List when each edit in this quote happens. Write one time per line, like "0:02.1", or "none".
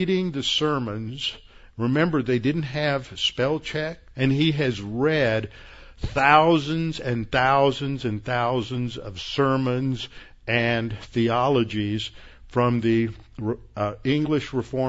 0:04.1